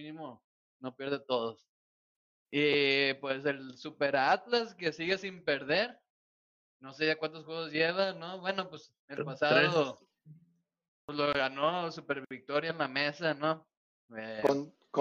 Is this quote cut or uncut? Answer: uncut